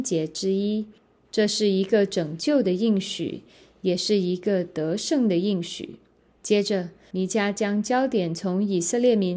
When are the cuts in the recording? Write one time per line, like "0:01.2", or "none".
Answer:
0:01.2
0:07.1

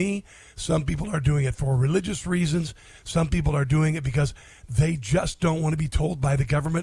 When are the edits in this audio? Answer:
none

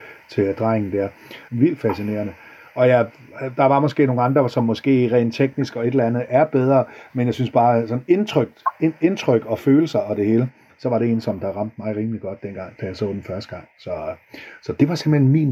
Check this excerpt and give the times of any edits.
0:01.5

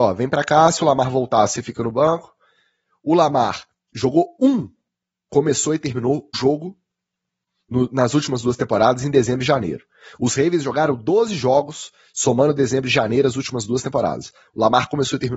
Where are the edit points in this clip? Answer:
0:06.3

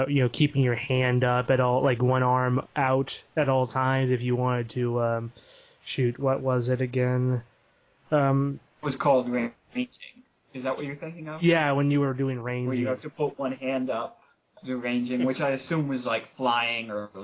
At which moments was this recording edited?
0:02.6

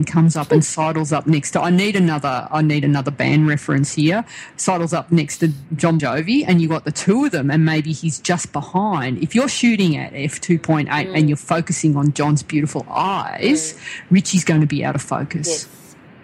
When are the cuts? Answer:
0:06.0

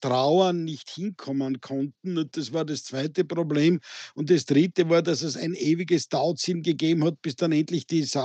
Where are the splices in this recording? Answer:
none

